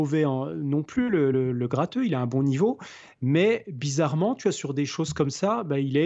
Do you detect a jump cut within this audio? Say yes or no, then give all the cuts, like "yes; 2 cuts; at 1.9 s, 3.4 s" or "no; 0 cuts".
no; 0 cuts